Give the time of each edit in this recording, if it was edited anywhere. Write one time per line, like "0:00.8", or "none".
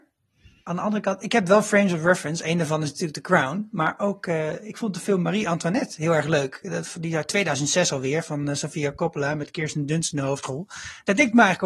0:01.2